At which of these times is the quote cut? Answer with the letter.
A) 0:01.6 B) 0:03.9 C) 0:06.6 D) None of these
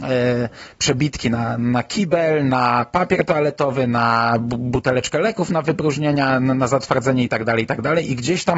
A